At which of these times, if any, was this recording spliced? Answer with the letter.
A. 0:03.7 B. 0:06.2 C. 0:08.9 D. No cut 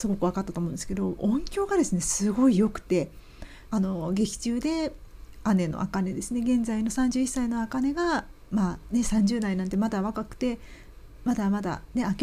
A